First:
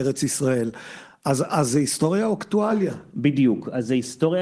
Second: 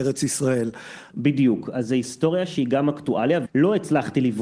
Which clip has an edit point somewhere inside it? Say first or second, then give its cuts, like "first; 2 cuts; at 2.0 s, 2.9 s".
second; 2 cuts; at 1.1 s, 3.5 s